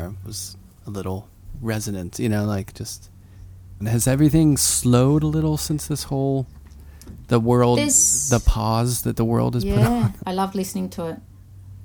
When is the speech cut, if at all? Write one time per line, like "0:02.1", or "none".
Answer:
0:03.8
0:10.2